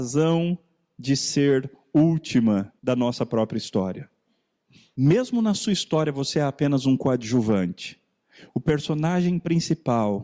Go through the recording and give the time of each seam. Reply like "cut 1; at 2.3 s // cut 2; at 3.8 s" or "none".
cut 1; at 2.8 s // cut 2; at 4.9 s